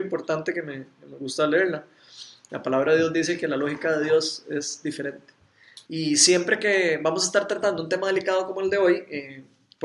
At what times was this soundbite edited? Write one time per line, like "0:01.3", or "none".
0:02.5
0:05.9